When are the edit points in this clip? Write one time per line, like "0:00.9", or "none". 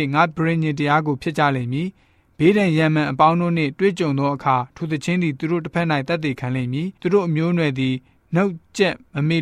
0:07.0

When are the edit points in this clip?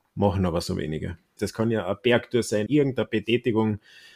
0:01.4
0:02.7

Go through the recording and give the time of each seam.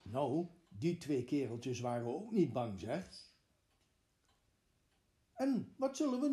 none

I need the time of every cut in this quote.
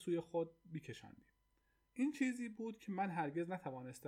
none

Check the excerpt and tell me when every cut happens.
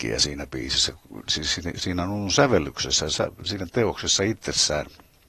none

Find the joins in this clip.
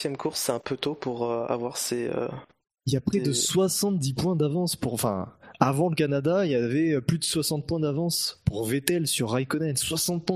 none

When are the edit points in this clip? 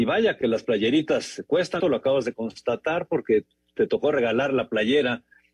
0:01.8

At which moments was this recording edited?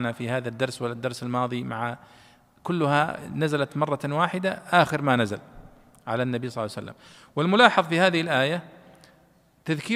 none

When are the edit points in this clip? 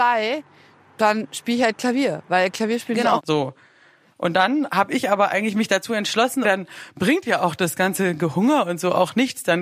0:03.2
0:06.4

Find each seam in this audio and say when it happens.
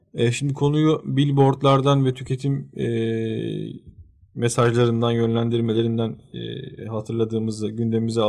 none

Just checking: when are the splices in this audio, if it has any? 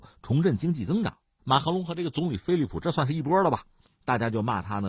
0:01.4
0:03.8

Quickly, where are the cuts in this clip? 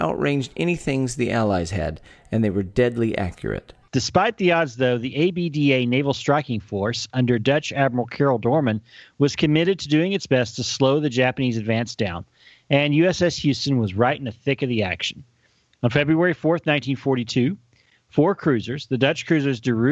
0:03.8

